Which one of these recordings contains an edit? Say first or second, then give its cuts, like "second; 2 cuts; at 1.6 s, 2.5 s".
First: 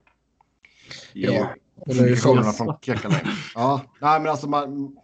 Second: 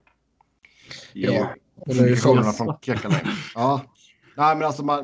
first; 1 cut; at 3.9 s